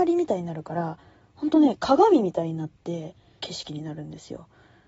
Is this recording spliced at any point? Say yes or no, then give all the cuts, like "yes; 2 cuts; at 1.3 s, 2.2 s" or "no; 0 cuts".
yes; 1 cut; at 3.4 s